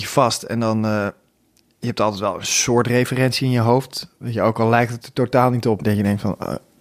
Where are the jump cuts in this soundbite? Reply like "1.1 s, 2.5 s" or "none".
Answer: 5.8 s